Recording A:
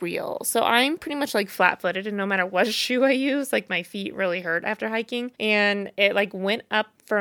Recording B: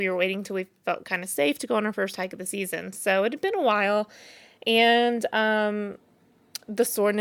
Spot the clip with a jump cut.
A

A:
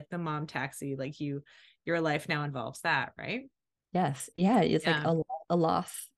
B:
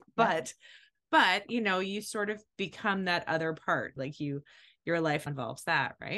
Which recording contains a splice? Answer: B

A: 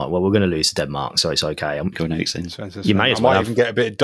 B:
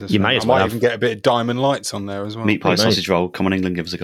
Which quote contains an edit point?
A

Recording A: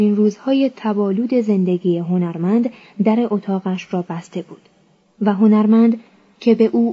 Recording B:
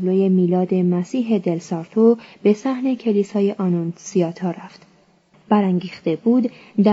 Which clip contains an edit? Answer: B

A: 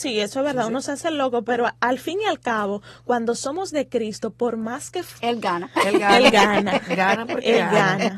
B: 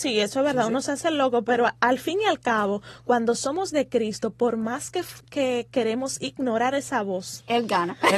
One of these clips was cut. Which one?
A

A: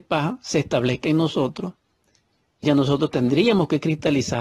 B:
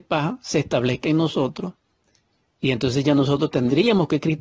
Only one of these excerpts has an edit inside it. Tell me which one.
A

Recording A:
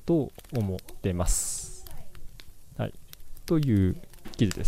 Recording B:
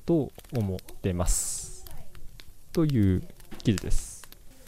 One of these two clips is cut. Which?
B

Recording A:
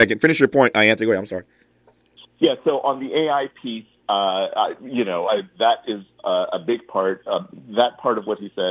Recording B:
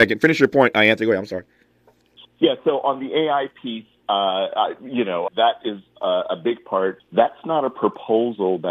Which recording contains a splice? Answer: B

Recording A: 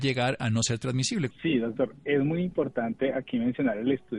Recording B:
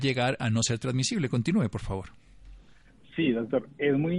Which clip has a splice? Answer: A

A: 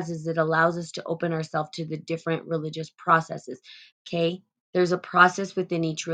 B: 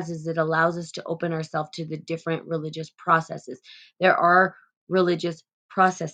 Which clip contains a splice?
A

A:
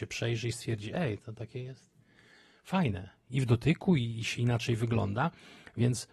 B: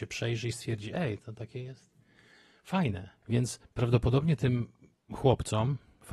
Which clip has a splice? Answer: B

